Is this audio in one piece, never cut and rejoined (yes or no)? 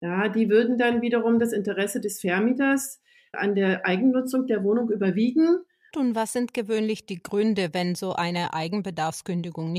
no